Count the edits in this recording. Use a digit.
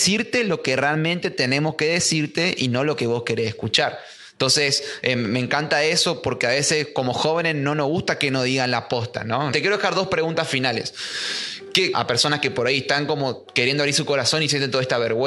2